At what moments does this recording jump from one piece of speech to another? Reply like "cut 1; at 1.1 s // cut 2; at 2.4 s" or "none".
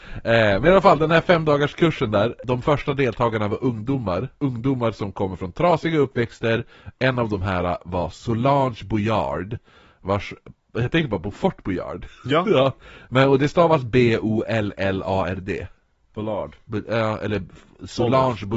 none

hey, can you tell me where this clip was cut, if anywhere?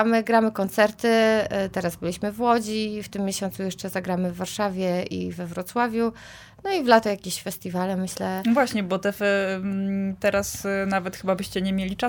none

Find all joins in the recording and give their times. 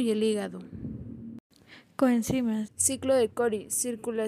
cut 1; at 2.7 s

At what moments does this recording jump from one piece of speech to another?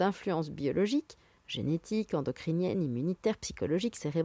none

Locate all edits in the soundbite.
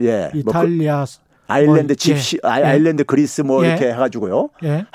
none

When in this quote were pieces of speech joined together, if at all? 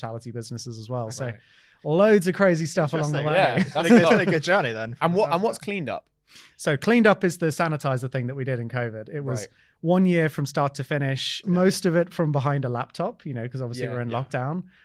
cut 1; at 11.4 s

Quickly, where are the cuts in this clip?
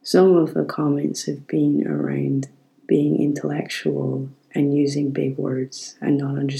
none

